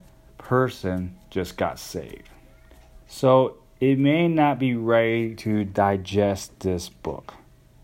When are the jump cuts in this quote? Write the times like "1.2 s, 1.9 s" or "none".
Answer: 3.0 s